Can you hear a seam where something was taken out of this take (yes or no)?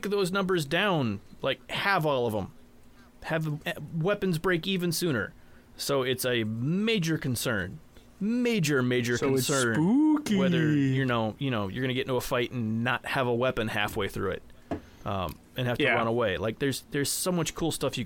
no